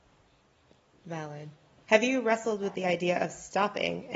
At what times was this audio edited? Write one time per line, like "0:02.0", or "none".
0:01.8